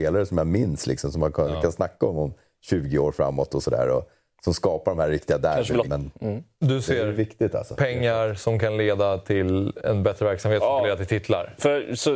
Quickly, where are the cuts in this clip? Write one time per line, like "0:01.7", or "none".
0:05.8